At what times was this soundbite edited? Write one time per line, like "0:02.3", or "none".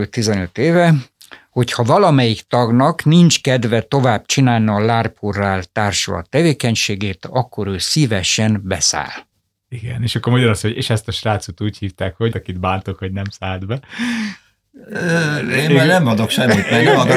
0:12.3